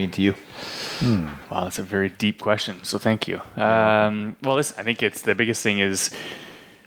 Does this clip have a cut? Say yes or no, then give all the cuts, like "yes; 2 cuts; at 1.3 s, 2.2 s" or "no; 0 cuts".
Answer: no; 0 cuts